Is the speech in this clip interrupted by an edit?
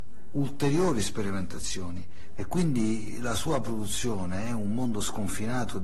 yes; 1 cut; at 2.4 s

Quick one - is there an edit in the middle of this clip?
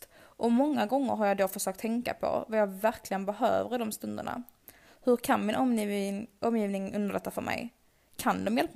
no; 0 cuts

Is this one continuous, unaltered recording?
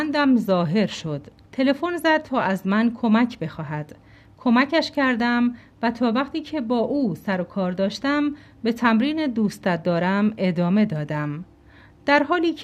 no; 1 cut; at 1.5 s

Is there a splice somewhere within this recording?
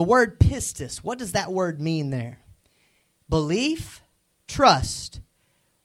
no; 0 cuts

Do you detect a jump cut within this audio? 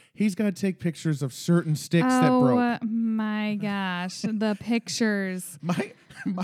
no; 0 cuts

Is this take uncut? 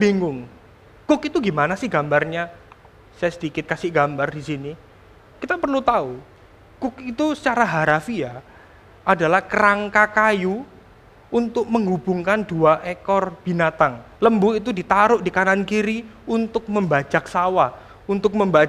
no; 1 cut; at 14.2 s

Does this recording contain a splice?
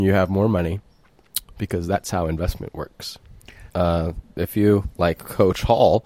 yes; 1 cut; at 3.7 s

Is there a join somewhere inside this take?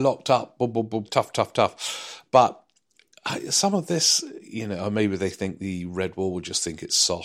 yes; 1 cut; at 1.0 s

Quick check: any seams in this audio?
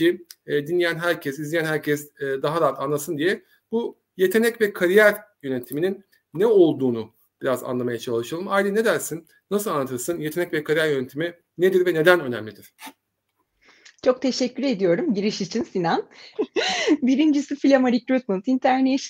yes; 1 cut; at 16.3 s

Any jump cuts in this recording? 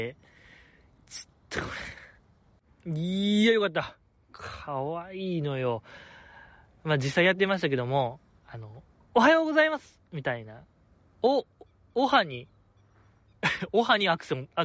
no; 0 cuts

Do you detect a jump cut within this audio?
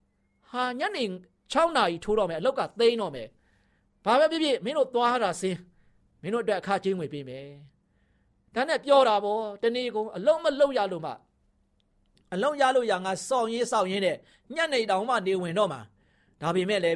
no; 0 cuts

